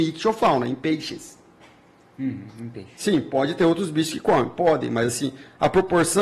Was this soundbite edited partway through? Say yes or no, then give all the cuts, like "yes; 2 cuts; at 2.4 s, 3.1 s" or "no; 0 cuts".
no; 0 cuts